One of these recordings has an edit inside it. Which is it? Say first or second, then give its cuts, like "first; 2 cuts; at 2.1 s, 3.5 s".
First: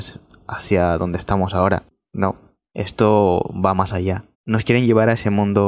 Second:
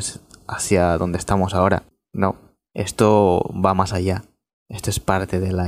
first; 1 cut; at 4.3 s